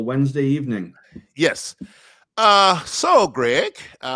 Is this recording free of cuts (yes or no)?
yes